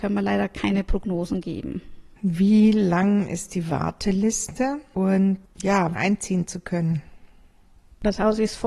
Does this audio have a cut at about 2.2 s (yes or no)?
yes